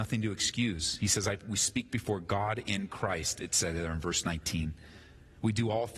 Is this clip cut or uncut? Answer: uncut